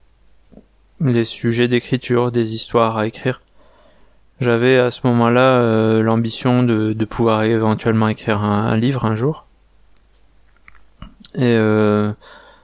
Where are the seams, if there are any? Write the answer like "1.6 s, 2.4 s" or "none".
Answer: none

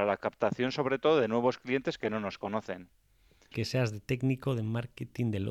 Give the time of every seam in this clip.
3.5 s

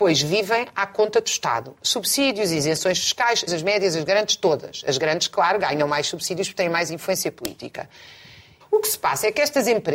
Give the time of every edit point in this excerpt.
3.5 s, 8.6 s

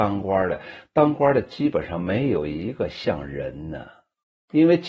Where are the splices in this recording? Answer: none

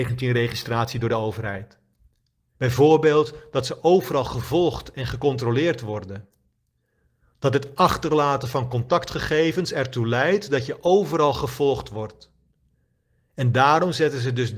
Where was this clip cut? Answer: 2.5 s

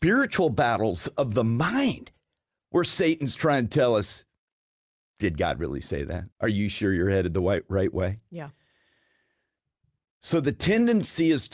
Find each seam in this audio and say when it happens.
6.3 s

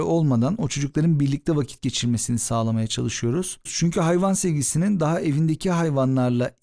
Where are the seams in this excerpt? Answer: 3.7 s

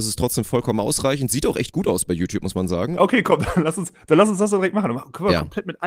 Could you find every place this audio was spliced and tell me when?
3.0 s

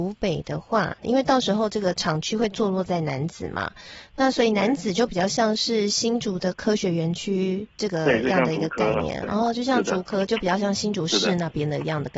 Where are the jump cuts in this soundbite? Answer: 1.0 s

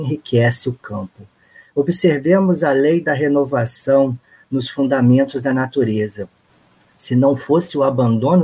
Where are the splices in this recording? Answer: 1.6 s

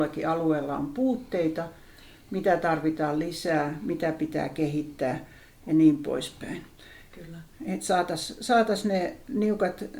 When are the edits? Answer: 7.1 s

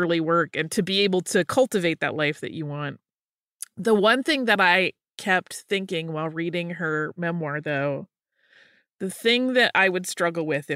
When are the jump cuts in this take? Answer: none

